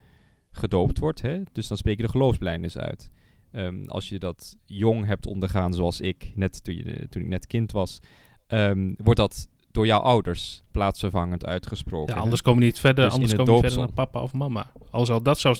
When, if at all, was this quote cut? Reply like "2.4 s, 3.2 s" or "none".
6.3 s